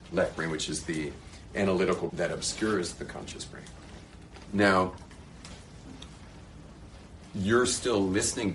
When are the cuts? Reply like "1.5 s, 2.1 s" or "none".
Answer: 2.1 s, 4.4 s